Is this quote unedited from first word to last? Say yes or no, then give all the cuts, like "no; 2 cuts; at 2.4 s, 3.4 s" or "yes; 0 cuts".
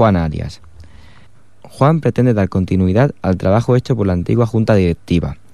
yes; 0 cuts